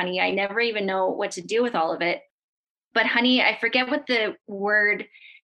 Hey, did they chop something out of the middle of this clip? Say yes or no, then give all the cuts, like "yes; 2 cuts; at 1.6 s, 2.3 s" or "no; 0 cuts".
no; 0 cuts